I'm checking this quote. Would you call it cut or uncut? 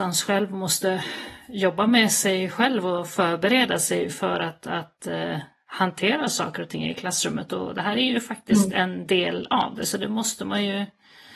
uncut